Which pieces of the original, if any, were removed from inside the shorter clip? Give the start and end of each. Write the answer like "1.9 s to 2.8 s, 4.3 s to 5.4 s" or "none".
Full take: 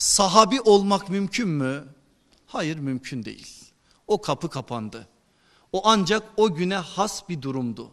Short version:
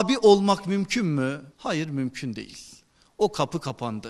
1.9 s to 2.4 s